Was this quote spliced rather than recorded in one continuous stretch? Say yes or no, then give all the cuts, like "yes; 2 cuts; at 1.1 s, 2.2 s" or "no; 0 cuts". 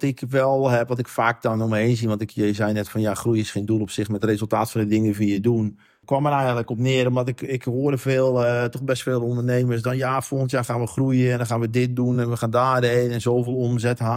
no; 0 cuts